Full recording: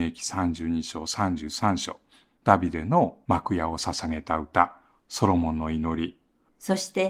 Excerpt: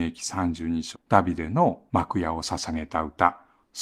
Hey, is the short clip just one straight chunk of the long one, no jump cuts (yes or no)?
no